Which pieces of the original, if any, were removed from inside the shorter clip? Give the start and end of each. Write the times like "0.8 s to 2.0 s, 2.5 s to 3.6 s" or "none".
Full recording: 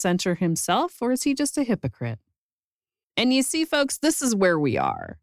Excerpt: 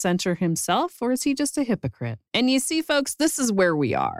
2.3 s to 3.1 s